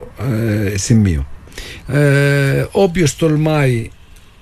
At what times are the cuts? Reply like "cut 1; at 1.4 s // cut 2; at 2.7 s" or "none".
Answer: cut 1; at 1.8 s